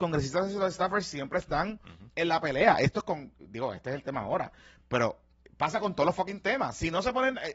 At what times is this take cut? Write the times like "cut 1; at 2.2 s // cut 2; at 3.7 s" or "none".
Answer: none